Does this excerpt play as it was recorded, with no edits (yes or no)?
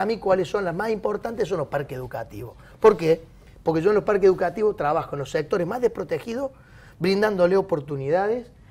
yes